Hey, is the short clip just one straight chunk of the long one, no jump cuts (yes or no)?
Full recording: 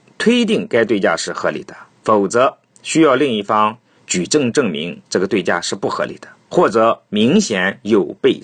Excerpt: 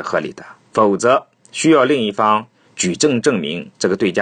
yes